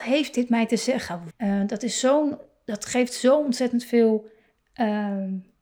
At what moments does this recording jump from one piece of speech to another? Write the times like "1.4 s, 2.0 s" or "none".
1.3 s